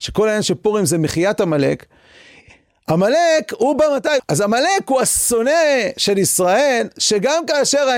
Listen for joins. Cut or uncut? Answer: cut